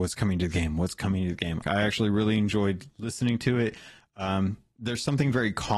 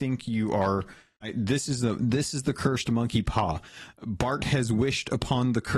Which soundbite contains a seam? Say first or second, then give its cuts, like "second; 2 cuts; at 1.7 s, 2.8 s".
first; 1 cut; at 1.6 s